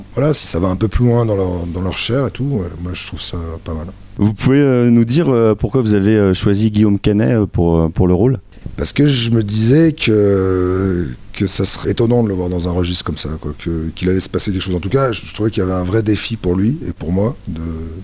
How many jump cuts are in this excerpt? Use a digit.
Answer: 1